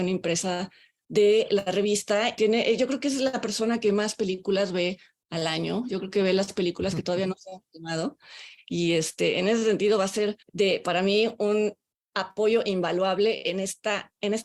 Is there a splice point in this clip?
yes; 2 cuts; at 2.4 s, 10.4 s

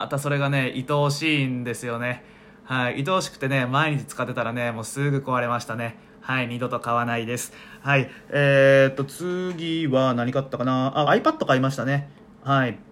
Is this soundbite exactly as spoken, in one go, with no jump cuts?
no; 1 cut; at 11.0 s

